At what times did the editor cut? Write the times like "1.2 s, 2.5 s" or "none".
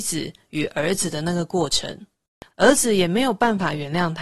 2.5 s